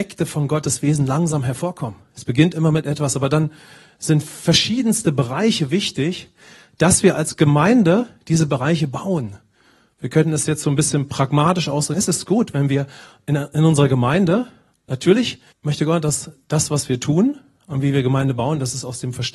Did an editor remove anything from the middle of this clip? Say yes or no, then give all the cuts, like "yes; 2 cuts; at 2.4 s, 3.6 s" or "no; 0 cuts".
yes; 2 cuts; at 11.9 s, 15.5 s